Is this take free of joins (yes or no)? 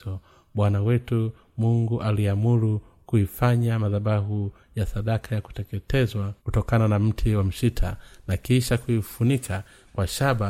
no